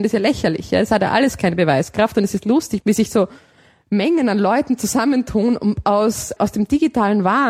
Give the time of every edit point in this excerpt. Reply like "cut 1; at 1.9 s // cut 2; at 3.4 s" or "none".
cut 1; at 2.8 s // cut 2; at 6.4 s